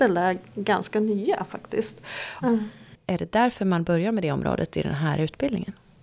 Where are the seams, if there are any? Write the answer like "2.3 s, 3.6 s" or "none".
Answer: 2.4 s